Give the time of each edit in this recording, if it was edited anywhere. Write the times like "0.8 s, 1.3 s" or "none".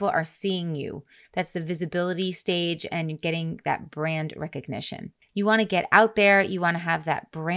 5.3 s